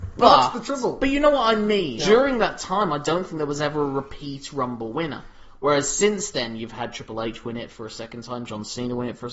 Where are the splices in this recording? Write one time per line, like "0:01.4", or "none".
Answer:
0:02.0